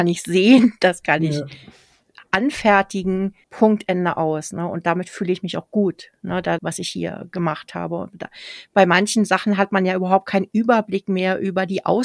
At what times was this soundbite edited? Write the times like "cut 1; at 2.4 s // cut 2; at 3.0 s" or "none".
cut 1; at 3.4 s // cut 2; at 6.6 s